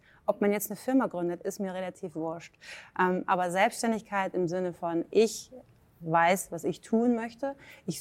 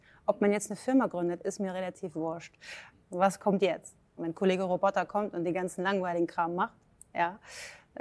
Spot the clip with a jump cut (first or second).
second